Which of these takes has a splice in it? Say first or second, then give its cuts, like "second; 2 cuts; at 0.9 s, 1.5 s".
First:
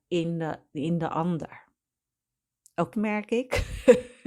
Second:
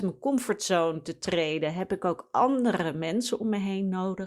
first; 1 cut; at 2.9 s